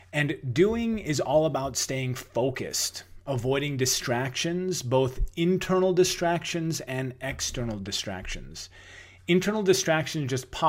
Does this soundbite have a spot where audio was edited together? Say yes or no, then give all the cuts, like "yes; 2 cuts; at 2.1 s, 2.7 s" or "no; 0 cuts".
no; 0 cuts